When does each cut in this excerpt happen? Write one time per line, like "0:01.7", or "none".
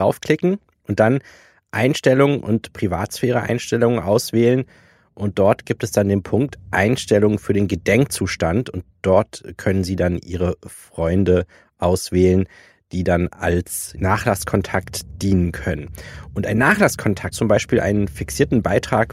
0:17.3